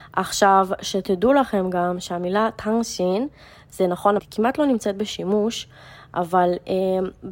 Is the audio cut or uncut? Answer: cut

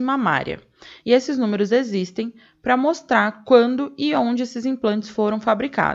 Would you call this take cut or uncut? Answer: cut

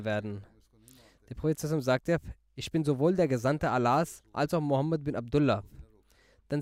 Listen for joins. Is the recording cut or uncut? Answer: uncut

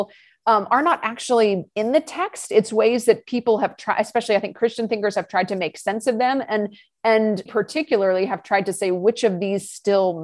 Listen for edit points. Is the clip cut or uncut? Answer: cut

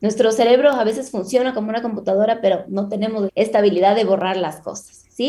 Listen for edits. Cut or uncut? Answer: cut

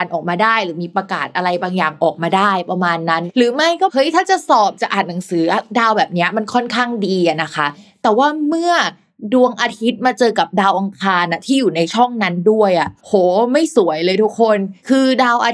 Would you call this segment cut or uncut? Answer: cut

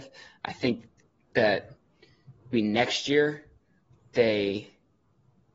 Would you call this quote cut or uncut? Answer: cut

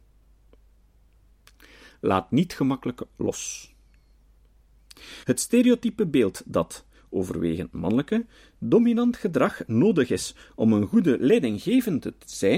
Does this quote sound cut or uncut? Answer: cut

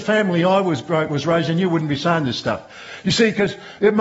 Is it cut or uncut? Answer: uncut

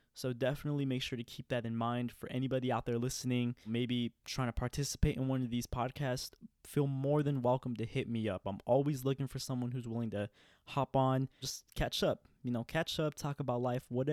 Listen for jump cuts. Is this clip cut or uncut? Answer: uncut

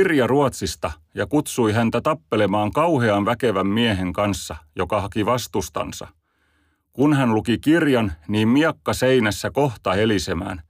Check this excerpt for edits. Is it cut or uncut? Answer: uncut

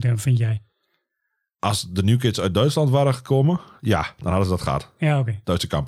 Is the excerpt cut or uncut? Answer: uncut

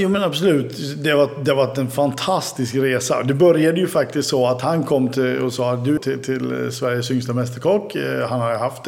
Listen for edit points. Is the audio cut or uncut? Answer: cut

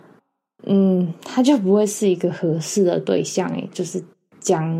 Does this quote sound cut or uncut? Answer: uncut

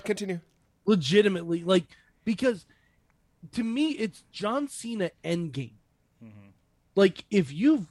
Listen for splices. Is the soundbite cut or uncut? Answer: uncut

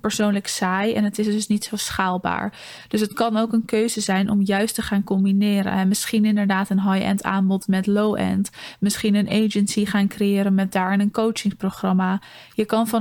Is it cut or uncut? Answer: uncut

